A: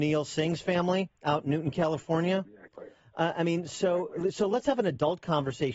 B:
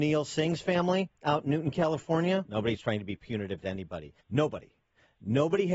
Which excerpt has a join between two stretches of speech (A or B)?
B